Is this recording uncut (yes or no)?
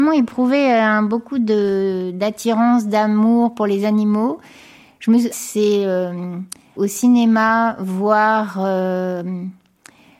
no